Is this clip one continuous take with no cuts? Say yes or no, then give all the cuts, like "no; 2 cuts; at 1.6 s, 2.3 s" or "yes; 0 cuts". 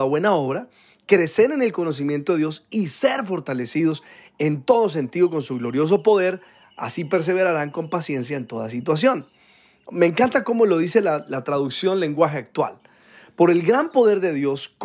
yes; 0 cuts